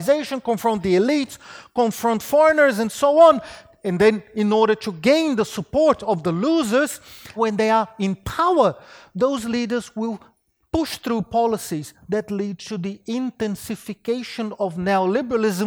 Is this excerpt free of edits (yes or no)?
no